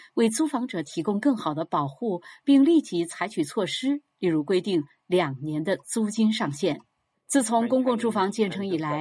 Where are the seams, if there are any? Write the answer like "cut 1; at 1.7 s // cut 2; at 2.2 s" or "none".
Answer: cut 1; at 7.1 s